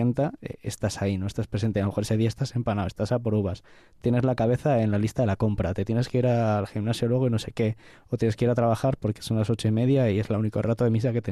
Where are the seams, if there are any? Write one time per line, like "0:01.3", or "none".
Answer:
none